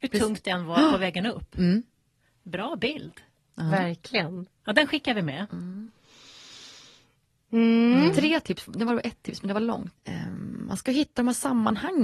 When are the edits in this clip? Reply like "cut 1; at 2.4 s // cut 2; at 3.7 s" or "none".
cut 1; at 5.5 s // cut 2; at 10.0 s